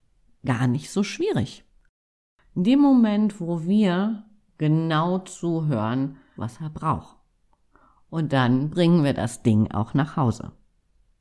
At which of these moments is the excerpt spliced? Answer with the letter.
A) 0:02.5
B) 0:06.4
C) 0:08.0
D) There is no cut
B